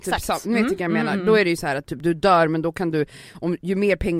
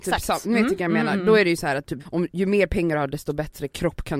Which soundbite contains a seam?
second; 1 cut; at 2.0 s

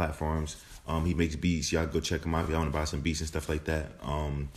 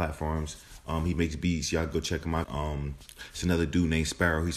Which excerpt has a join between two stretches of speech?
second; 1 cut; at 2.4 s

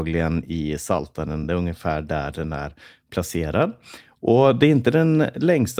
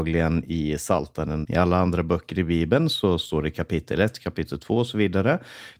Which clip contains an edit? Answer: second; 1 cut; at 1.4 s

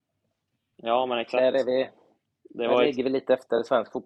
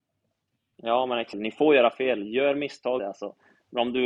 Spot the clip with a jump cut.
second; 2 cuts; at 1.3 s, 3.0 s

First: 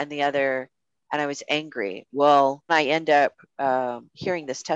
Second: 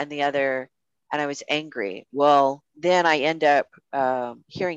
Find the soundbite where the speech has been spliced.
first; 1 cut; at 2.7 s

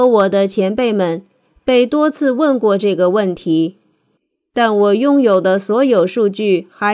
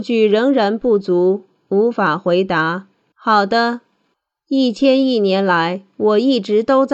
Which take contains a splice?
second; 1 cut; at 3.1 s

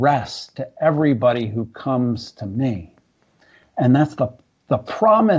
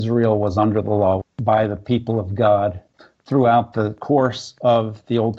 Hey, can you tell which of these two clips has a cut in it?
second; 1 cut; at 1.2 s

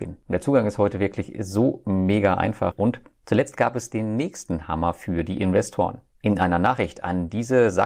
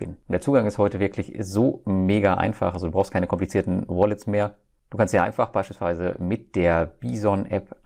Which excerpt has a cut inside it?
first; 1 cut; at 2.7 s

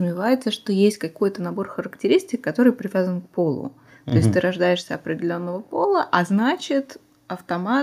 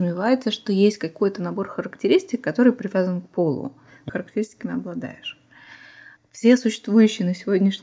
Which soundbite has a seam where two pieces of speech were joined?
second; 2 cuts; at 4.1 s, 6.2 s

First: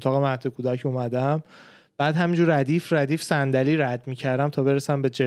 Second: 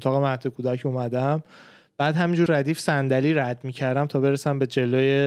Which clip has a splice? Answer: second; 1 cut; at 2.5 s

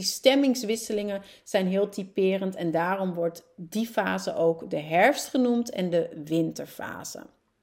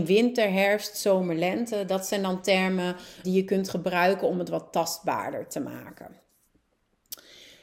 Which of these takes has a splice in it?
second; 1 cut; at 3.2 s

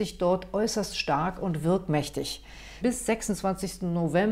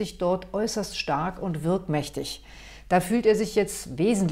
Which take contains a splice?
first; 1 cut; at 2.8 s

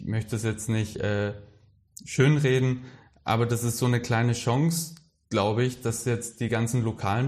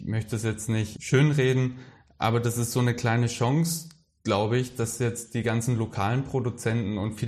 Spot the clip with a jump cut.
second; 1 cut; at 0.9 s

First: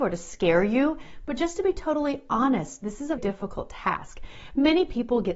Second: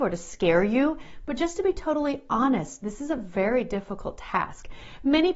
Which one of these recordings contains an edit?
first; 1 cut; at 3.2 s

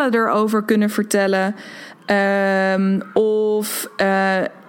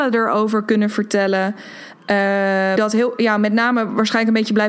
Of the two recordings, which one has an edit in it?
second; 1 cut; at 2.8 s

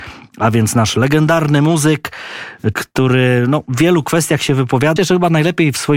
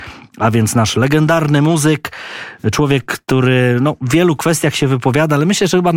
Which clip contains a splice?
first; 2 cuts; at 2.7 s, 5.0 s

